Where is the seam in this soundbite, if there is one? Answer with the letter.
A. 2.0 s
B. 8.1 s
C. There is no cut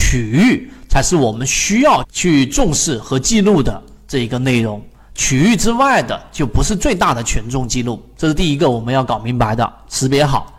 A